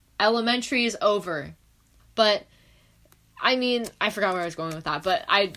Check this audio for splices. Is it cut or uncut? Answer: cut